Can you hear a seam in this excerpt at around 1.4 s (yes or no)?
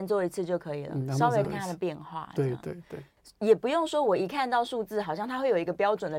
yes